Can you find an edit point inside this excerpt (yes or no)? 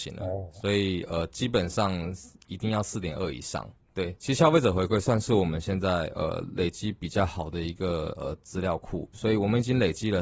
yes